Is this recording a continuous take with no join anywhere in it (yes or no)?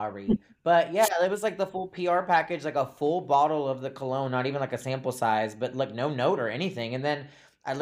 yes